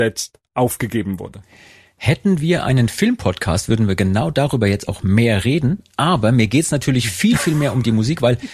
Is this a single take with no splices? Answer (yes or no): yes